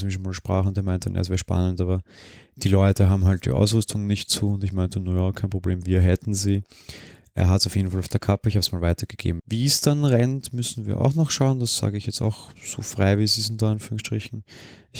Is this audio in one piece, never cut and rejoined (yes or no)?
no